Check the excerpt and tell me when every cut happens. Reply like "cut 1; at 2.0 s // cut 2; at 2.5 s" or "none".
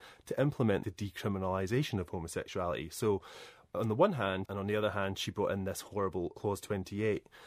cut 1; at 4.5 s